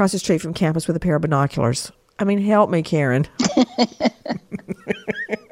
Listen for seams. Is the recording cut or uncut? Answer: uncut